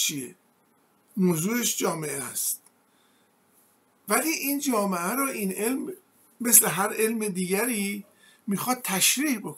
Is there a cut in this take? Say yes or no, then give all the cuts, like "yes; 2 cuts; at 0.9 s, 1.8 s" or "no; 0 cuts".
no; 0 cuts